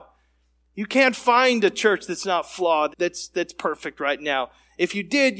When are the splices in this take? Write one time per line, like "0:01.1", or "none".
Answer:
0:02.9